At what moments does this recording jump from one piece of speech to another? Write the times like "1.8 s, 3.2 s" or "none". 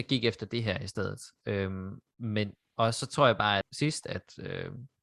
1.4 s, 3.6 s